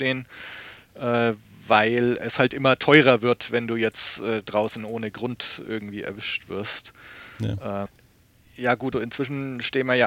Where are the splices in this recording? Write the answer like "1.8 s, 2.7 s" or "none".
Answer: 7.9 s, 8.9 s